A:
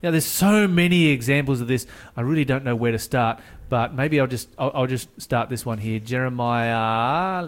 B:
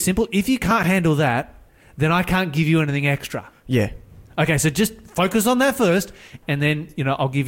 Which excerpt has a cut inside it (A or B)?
B